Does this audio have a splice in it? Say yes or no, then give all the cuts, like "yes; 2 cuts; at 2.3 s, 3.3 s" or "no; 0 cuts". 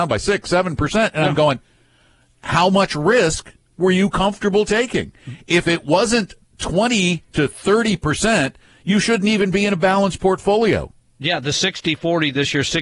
no; 0 cuts